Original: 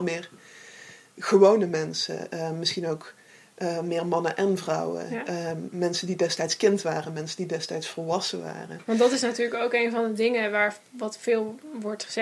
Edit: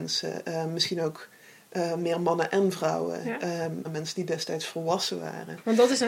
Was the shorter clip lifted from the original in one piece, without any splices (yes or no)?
no